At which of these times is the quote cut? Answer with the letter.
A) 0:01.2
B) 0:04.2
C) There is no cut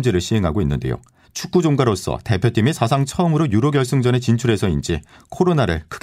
A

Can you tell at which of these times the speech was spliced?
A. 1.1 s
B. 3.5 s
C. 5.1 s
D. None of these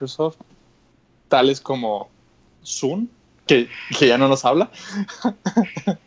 B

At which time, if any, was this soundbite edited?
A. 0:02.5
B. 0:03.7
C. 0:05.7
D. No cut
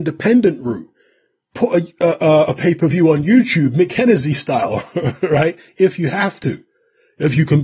D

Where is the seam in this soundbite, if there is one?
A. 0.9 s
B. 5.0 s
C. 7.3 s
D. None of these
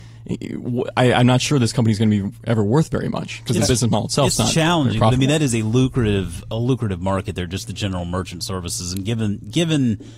D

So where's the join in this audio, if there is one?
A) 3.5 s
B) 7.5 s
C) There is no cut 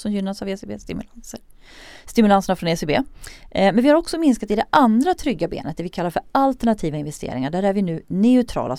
C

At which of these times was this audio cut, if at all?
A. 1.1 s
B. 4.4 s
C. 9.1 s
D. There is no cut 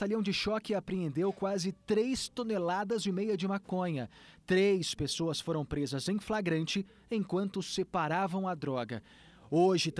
D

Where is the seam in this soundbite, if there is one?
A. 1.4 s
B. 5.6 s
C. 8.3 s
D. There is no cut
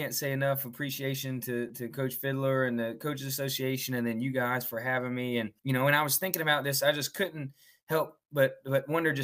B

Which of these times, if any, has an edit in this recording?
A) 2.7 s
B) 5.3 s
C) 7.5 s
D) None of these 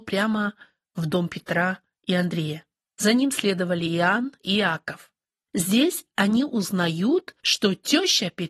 D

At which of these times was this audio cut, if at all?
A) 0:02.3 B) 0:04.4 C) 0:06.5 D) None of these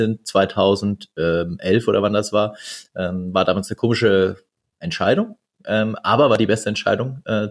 D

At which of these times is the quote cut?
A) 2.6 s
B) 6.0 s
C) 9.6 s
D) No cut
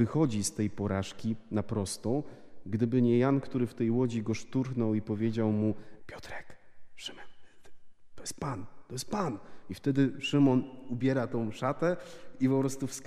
B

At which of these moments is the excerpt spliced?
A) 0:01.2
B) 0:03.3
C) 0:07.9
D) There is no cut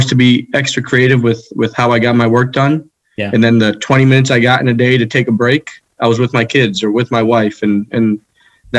D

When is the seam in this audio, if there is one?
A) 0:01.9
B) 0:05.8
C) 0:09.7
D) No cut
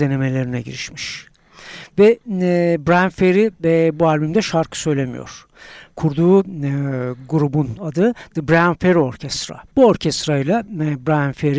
C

